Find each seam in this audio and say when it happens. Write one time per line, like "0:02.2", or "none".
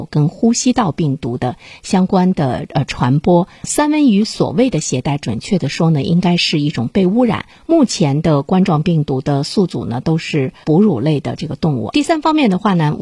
none